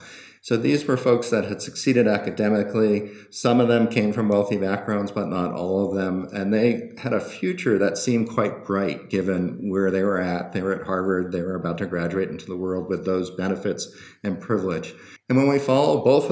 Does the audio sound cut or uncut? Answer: uncut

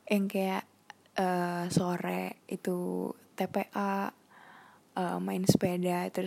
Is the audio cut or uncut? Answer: uncut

